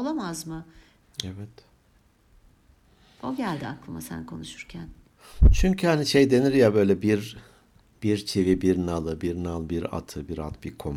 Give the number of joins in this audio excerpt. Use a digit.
1